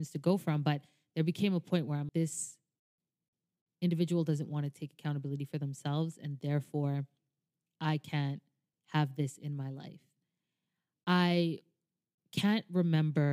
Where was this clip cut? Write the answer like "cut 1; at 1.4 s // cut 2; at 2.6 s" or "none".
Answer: cut 1; at 2.1 s